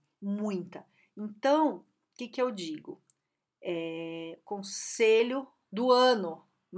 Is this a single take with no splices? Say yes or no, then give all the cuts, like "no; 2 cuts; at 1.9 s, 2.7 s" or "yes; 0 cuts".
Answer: yes; 0 cuts